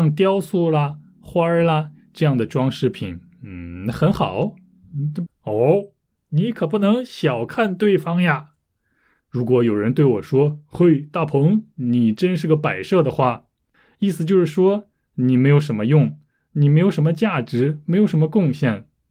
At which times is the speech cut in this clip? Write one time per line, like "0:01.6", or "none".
0:05.3
0:09.2